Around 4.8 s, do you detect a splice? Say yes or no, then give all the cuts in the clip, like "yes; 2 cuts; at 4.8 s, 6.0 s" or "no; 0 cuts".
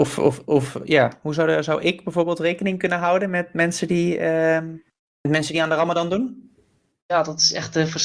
no; 0 cuts